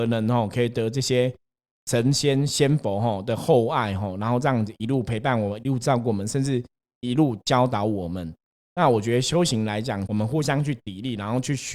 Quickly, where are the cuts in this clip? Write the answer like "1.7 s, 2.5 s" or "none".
10.1 s